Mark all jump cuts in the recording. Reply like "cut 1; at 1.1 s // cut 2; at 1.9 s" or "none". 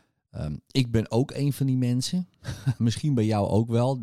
cut 1; at 2.8 s